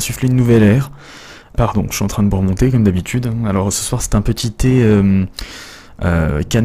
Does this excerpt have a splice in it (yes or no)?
yes